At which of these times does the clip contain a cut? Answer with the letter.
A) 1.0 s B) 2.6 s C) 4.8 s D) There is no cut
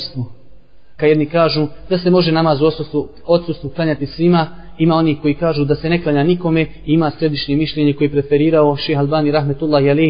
A